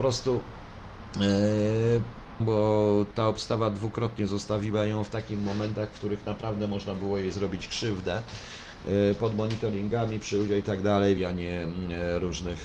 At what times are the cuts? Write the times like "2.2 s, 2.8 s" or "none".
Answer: 2.4 s, 11.2 s